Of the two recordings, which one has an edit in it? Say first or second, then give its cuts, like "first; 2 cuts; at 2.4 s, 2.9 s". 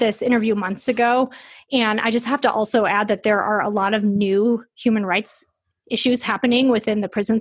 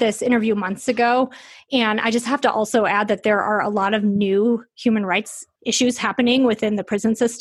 second; 1 cut; at 5.6 s